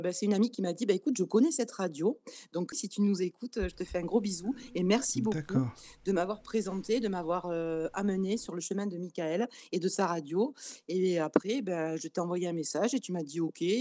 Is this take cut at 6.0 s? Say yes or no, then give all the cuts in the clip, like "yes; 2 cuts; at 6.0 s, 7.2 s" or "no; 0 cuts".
no; 1 cut; at 2.7 s